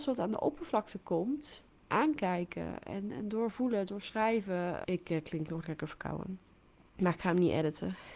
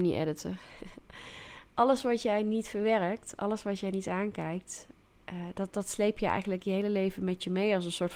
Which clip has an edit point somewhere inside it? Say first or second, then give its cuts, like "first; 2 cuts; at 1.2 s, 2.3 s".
first; 1 cut; at 4.8 s